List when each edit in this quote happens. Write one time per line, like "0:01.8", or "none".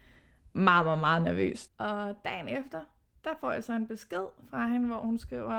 0:01.7